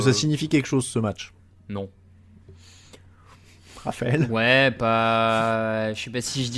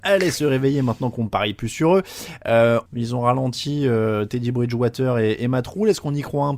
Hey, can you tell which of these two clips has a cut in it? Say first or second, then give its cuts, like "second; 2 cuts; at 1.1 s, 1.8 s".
second; 1 cut; at 2.9 s